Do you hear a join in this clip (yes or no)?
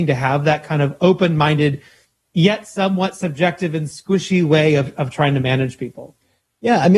no